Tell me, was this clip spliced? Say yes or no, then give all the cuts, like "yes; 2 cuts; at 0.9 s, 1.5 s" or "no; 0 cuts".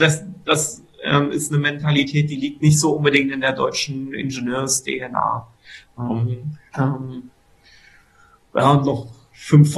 yes; 1 cut; at 6.7 s